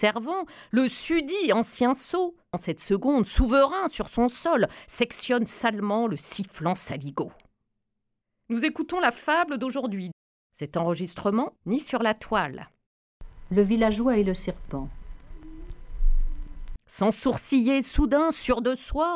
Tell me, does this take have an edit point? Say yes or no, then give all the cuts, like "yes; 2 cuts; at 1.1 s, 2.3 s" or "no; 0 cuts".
yes; 3 cuts; at 2.5 s, 11.6 s, 16.8 s